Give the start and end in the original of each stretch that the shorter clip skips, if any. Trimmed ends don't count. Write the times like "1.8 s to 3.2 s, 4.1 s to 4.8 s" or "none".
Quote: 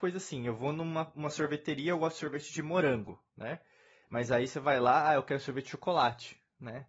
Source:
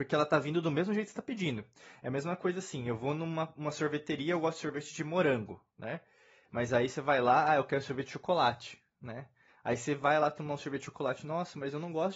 none